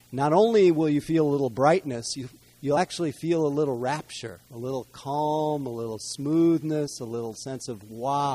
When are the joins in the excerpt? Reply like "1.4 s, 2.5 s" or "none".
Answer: none